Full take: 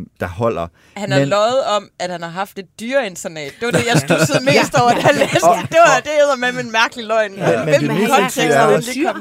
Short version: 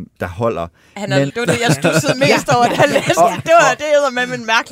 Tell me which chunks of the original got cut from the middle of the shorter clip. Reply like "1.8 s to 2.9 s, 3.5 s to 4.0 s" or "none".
1.3 s to 3.6 s